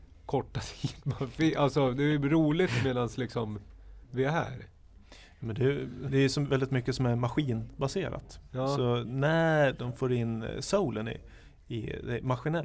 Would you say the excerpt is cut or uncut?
cut